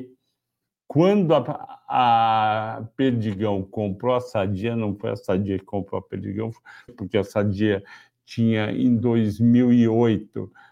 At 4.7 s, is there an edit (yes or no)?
no